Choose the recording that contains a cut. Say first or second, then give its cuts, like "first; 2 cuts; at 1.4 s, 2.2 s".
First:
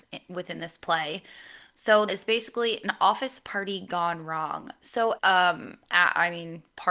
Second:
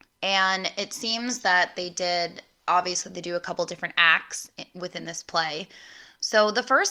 first; 2 cuts; at 2.1 s, 5.2 s